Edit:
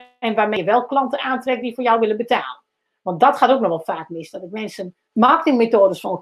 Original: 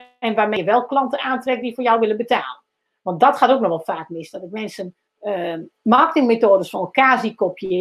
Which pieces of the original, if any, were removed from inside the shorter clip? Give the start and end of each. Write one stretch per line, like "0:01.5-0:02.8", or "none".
0:05.1-0:05.8